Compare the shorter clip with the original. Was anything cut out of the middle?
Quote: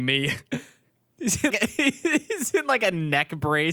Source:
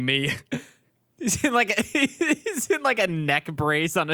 yes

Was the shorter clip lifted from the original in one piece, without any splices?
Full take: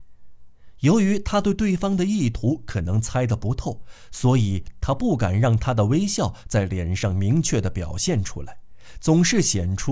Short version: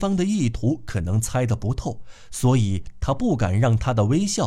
yes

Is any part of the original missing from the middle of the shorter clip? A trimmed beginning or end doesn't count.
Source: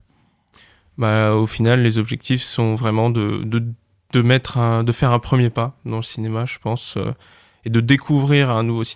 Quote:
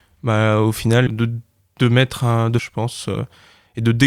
yes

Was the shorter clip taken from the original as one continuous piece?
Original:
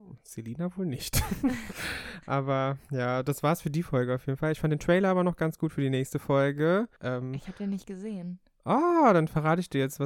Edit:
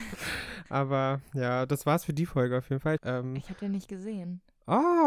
no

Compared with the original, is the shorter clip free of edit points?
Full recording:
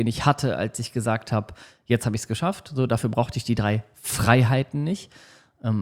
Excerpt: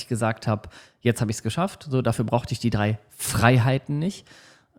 yes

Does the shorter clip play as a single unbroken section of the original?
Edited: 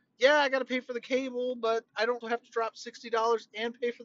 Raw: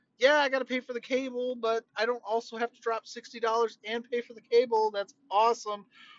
no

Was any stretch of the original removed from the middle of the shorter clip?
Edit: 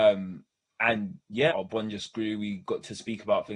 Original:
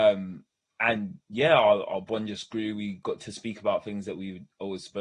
yes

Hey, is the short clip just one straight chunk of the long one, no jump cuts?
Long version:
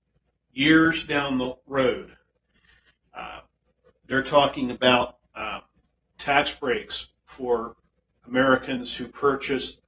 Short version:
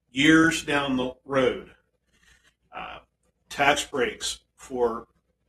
no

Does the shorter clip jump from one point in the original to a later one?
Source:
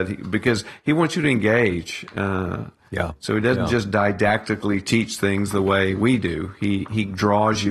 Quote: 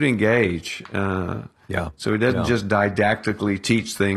no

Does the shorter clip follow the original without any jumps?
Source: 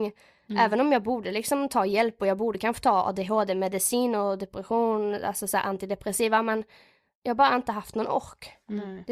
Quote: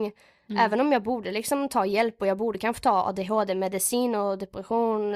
yes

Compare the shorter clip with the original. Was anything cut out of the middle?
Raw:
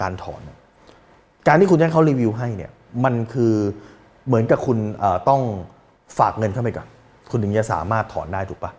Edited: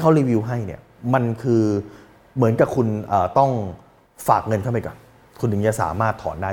no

